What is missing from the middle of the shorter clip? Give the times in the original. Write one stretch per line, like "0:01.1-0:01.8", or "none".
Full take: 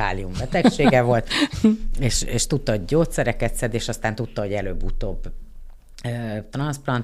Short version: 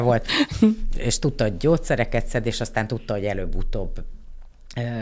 0:02.0-0:02.2